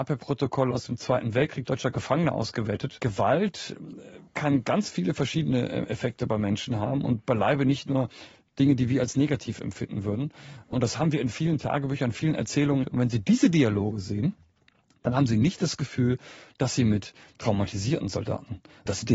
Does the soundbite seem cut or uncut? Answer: cut